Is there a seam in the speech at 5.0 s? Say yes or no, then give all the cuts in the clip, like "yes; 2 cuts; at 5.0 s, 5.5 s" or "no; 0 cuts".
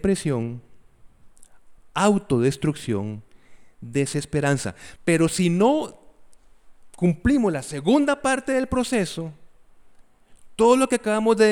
yes; 2 cuts; at 1.8 s, 5.0 s